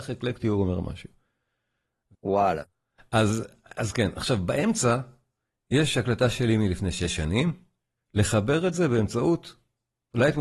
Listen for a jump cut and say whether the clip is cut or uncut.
cut